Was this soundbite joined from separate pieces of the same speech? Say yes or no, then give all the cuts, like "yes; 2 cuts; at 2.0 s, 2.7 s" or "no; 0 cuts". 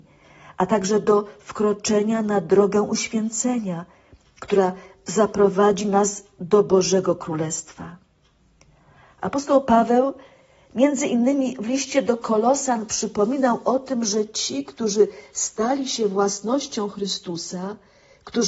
no; 0 cuts